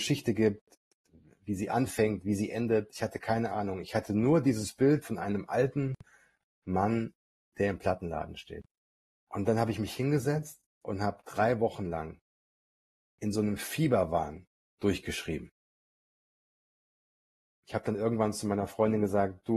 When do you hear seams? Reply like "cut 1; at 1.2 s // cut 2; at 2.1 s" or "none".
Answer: cut 1; at 9.2 s